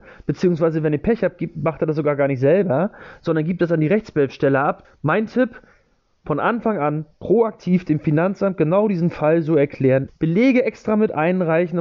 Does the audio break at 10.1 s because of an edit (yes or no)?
yes